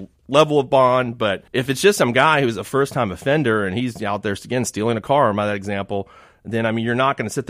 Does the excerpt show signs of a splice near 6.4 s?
no; 1 cut; at 1.5 s

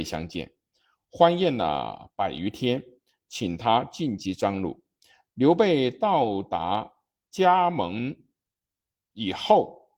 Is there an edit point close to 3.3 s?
yes; 1 cut; at 3.3 s

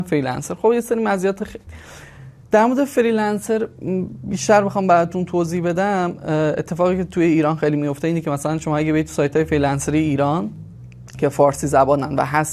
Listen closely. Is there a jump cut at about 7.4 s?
no; 1 cut; at 1.7 s

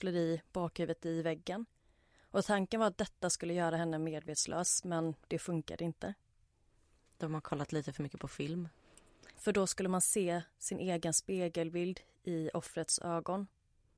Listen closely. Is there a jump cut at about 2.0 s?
no; 1 cut; at 9.3 s

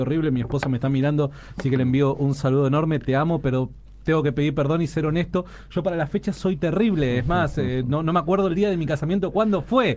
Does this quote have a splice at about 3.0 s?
no; 0 cuts

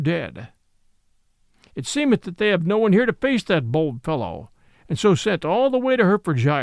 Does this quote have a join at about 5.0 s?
no; 0 cuts

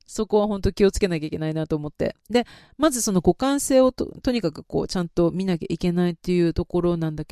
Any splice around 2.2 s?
no; 0 cuts

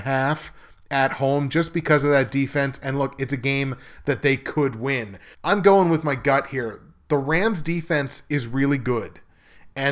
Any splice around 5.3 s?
yes; 1 cut; at 5.3 s

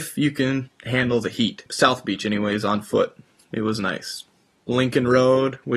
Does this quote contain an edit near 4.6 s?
no; 1 cut; at 1.7 s

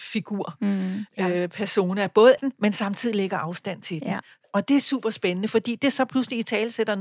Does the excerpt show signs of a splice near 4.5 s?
no; 1 cut; at 2.4 s

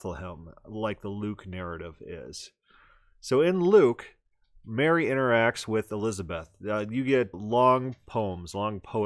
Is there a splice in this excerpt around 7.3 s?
yes; 1 cut; at 7.3 s

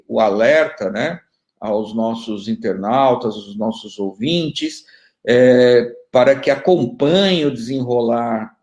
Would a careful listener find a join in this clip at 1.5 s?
no; 0 cuts

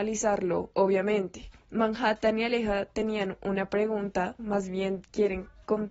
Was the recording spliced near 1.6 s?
no; 1 cut; at 4.4 s

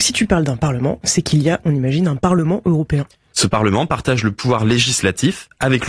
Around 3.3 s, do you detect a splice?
yes; 1 cut; at 3.3 s

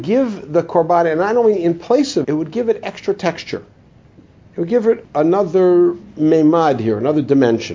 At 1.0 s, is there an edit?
no; 2 cuts; at 2.2 s, 5.0 s

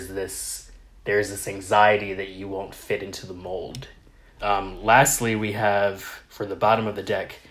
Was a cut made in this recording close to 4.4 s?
yes; 1 cut; at 4.4 s

